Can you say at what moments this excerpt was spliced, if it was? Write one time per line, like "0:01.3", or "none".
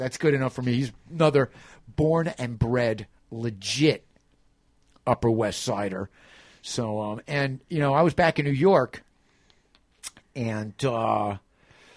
none